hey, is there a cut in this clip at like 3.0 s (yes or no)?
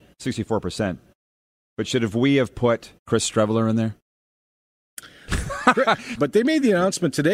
yes